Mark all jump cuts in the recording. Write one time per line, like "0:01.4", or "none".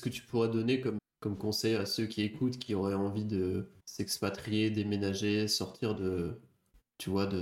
0:01.0
0:03.8